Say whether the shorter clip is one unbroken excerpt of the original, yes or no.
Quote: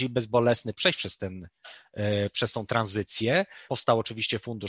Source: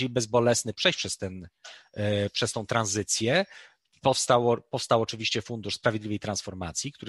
no